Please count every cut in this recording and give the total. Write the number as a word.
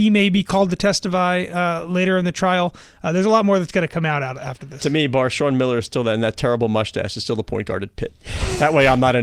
zero